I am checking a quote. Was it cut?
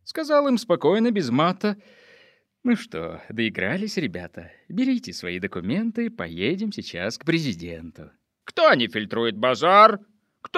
yes; 1 cut; at 8.4 s

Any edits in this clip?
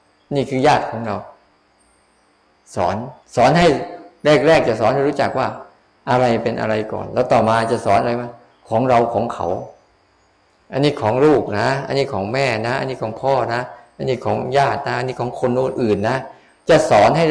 yes; 1 cut; at 3.2 s

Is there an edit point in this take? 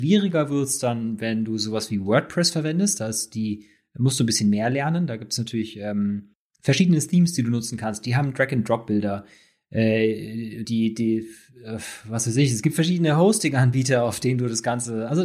yes; 1 cut; at 10.6 s

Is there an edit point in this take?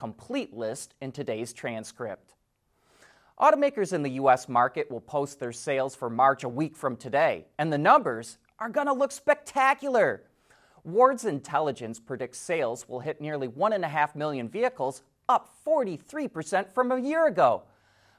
no; 0 cuts

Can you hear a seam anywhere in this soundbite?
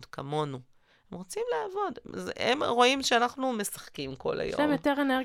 no; 0 cuts

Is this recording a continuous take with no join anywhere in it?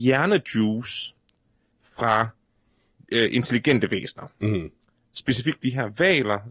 yes; 0 cuts

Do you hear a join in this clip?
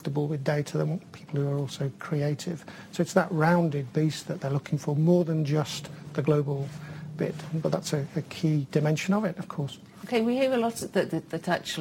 no; 0 cuts

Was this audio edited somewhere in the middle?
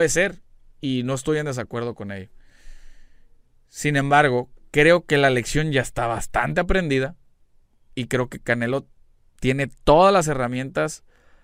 no; 0 cuts

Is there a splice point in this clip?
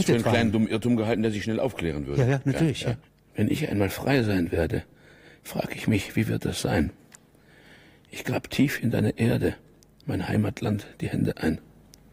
no; 0 cuts

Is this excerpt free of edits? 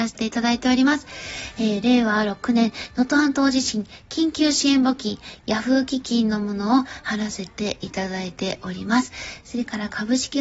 yes; 0 cuts

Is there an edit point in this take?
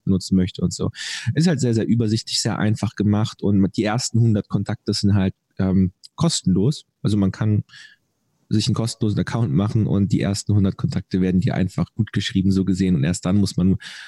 no; 0 cuts

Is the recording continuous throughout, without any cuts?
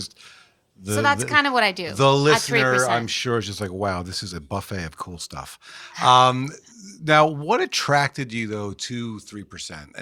yes; 0 cuts

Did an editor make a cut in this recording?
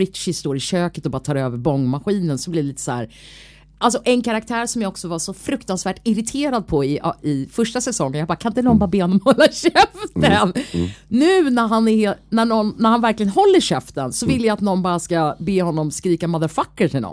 no; 0 cuts

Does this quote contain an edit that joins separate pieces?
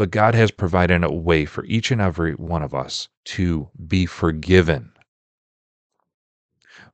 yes; 1 cut; at 3.1 s

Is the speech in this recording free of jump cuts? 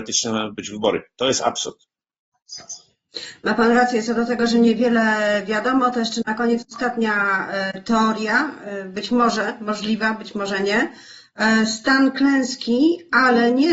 yes; 0 cuts

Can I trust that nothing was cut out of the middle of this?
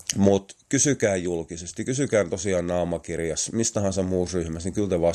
yes; 0 cuts

